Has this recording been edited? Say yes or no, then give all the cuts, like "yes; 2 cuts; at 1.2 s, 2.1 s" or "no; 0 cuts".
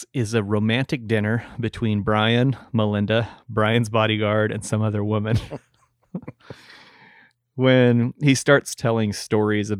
no; 0 cuts